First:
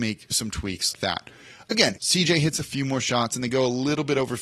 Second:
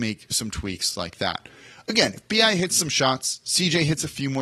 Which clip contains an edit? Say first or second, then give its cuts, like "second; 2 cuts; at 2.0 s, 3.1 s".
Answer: first; 2 cuts; at 0.9 s, 2.0 s